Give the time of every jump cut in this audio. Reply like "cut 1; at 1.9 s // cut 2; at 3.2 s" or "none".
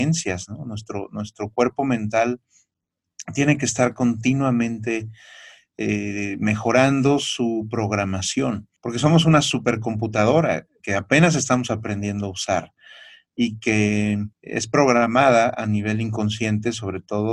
cut 1; at 8.8 s // cut 2; at 10.8 s // cut 3; at 14.3 s